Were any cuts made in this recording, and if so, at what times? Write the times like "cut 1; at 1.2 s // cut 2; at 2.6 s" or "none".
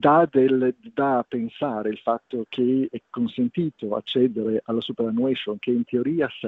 cut 1; at 2.9 s